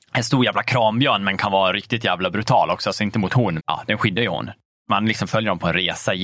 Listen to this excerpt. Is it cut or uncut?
cut